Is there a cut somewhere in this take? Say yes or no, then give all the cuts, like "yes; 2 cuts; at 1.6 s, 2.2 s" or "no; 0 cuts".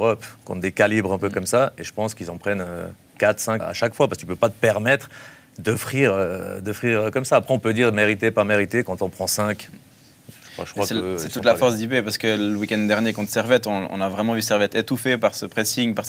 yes; 1 cut; at 3.6 s